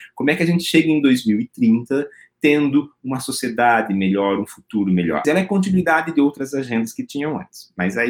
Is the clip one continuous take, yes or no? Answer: no